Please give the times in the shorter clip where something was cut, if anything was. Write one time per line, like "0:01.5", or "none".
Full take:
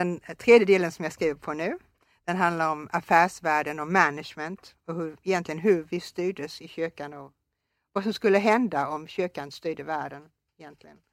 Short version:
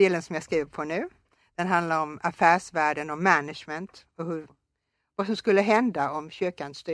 0:04.5